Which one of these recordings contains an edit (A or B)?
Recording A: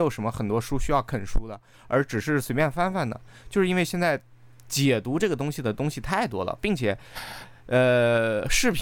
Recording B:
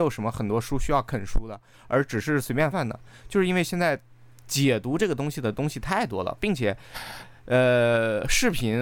B